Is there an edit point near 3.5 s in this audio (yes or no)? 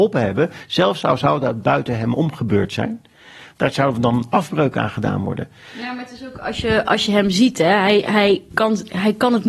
yes